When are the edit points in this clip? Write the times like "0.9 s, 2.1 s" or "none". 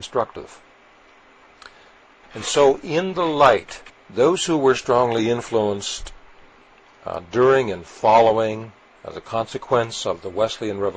2.2 s, 3.9 s